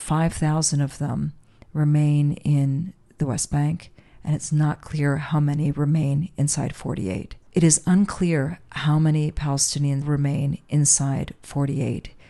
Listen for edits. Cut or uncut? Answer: cut